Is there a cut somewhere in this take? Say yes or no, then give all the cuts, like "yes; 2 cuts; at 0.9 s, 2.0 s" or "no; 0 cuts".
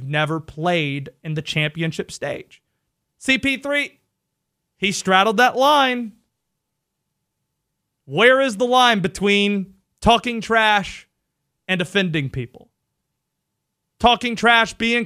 yes; 1 cut; at 3.0 s